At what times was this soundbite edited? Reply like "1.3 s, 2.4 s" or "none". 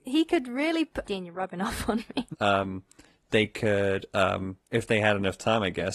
1.0 s, 2.3 s, 4.7 s